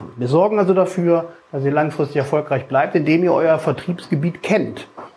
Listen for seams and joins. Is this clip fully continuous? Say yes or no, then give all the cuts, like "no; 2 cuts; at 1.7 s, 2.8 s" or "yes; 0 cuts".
yes; 0 cuts